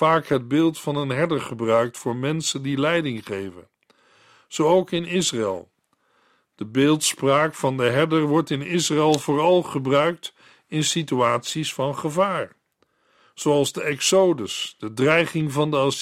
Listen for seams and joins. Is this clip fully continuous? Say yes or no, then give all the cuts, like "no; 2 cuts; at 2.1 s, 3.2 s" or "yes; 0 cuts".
yes; 0 cuts